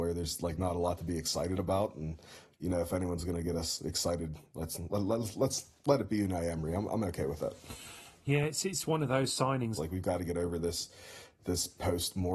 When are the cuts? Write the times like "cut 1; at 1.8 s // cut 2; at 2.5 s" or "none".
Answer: cut 1; at 9.8 s